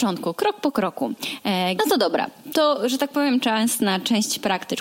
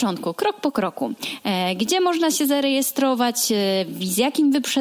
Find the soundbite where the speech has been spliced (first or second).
first